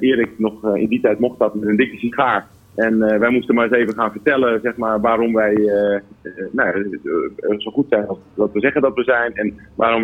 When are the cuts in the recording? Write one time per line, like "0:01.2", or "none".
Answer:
none